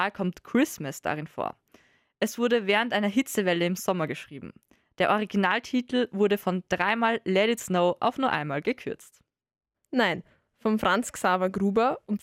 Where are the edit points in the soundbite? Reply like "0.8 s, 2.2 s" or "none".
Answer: 9.7 s